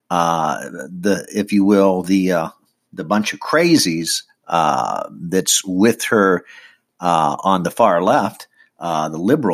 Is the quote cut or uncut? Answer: uncut